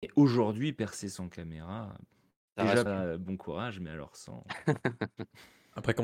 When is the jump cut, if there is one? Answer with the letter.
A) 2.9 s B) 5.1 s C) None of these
A